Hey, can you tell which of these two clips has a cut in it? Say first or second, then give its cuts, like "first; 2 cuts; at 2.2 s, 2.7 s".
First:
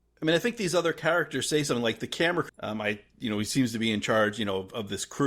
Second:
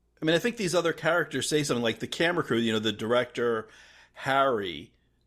first; 1 cut; at 2.5 s